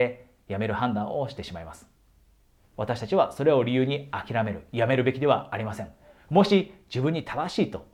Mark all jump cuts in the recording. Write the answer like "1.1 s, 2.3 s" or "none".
2.7 s